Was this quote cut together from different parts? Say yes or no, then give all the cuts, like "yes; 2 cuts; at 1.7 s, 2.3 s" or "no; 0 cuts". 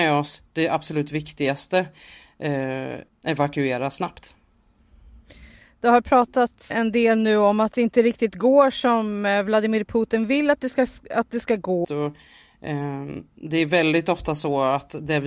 yes; 3 cuts; at 3.1 s, 6.7 s, 11.8 s